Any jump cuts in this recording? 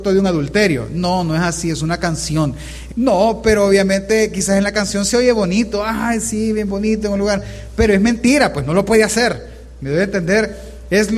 yes; 1 cut; at 2.9 s

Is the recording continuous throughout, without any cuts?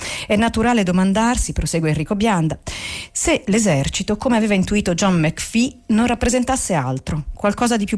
yes; 0 cuts

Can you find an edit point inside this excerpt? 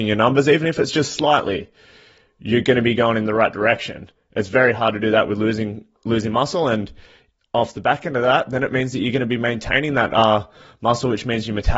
no; 0 cuts

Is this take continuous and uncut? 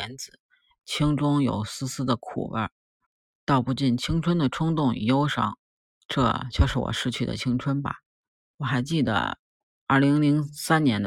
yes; 0 cuts

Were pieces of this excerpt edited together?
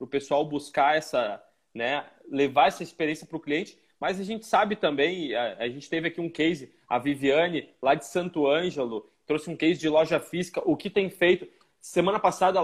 no; 0 cuts

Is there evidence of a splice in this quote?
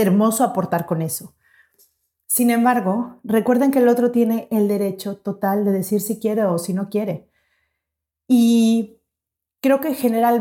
no; 0 cuts

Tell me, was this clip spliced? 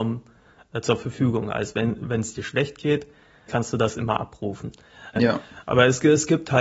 yes; 2 cuts; at 3.5 s, 5.2 s

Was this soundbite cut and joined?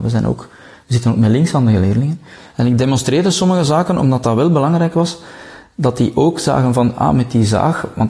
no; 0 cuts

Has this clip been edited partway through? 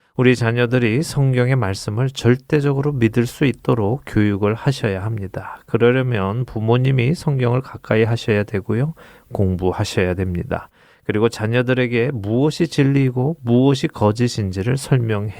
no; 0 cuts

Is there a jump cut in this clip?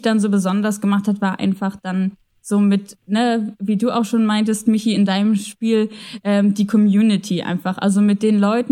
no; 0 cuts

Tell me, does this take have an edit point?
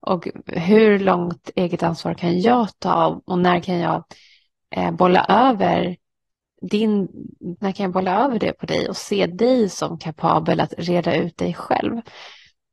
yes; 1 cut; at 7.6 s

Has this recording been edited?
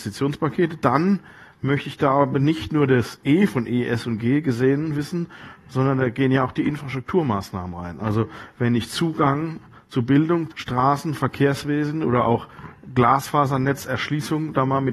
yes; 1 cut; at 10.5 s

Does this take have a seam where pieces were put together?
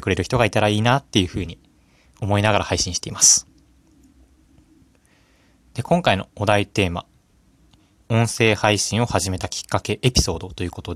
no; 0 cuts

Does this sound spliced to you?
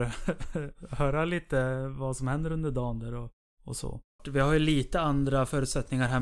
yes; 1 cut; at 4.2 s

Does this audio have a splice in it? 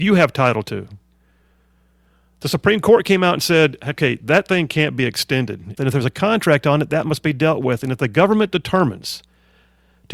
yes; 1 cut; at 5.8 s

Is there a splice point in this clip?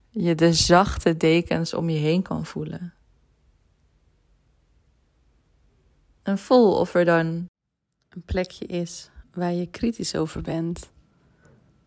no; 0 cuts

